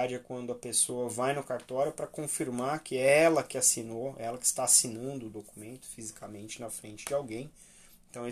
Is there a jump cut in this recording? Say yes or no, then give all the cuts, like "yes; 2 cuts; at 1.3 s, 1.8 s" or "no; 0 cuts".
no; 0 cuts